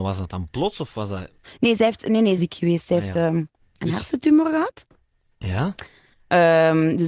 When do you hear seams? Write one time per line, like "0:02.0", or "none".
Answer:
0:02.4